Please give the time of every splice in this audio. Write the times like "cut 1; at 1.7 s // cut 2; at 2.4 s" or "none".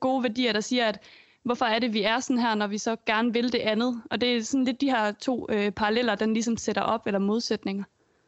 none